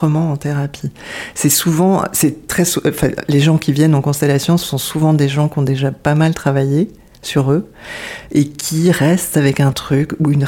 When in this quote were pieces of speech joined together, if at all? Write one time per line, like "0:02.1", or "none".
none